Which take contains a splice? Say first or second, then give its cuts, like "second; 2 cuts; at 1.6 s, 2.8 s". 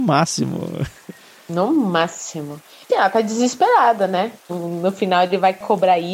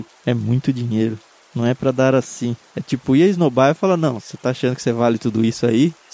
first; 2 cuts; at 2.9 s, 4.5 s